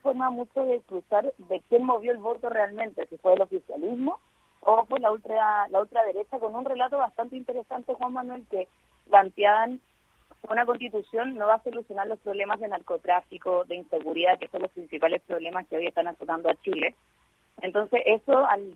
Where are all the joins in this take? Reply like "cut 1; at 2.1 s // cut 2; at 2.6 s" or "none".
cut 1; at 1.6 s